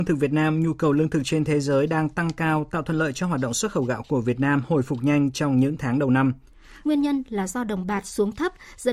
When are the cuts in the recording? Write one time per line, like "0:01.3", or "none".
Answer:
0:06.8

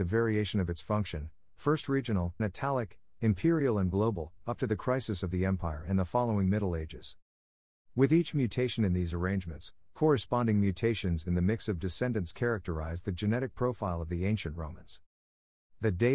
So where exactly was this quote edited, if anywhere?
0:02.4

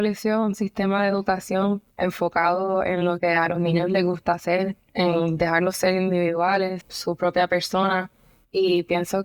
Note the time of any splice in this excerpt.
0:01.9
0:06.8

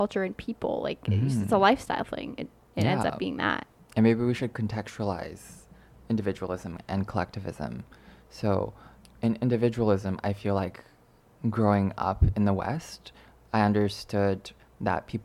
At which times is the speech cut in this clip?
none

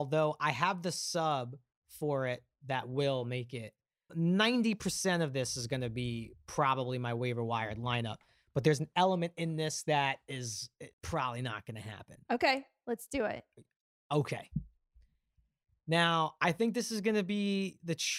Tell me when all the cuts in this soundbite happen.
0:04.1
0:10.9

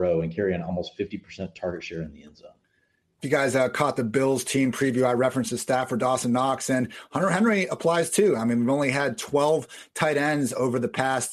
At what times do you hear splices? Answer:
none

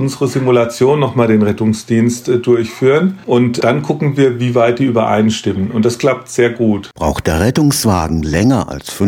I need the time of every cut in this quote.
none

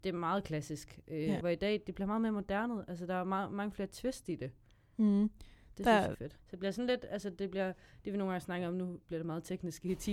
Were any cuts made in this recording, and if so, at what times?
0:01.4
0:06.4

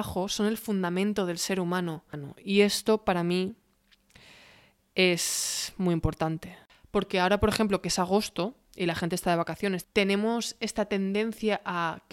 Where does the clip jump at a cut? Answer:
none

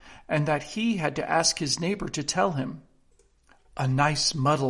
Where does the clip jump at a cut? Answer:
none

